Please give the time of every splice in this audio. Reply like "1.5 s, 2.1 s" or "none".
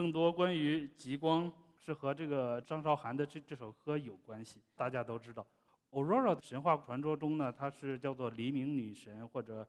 2.6 s, 4.8 s